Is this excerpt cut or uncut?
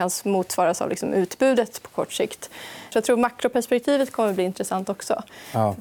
cut